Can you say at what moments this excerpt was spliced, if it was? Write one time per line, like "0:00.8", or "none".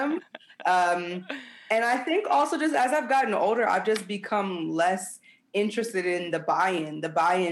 none